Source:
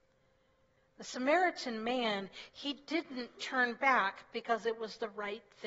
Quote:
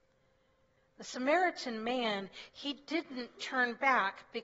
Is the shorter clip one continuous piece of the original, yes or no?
yes